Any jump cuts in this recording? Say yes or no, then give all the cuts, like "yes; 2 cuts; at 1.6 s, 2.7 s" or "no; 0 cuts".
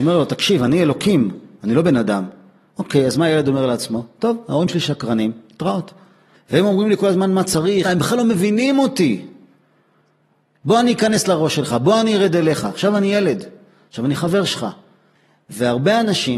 yes; 3 cuts; at 6.3 s, 7.8 s, 10.5 s